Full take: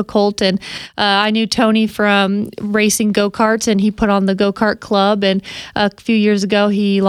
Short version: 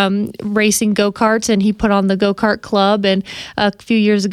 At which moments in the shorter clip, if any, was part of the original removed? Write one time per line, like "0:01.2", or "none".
none